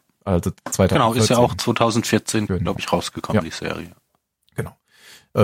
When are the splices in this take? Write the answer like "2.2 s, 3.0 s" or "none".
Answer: 2.5 s